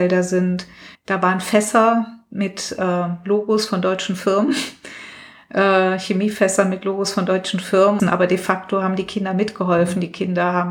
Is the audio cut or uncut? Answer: cut